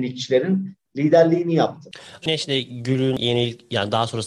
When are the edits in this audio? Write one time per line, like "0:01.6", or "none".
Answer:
0:02.2